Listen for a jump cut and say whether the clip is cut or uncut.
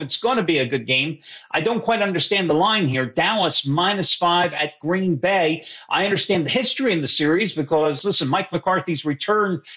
uncut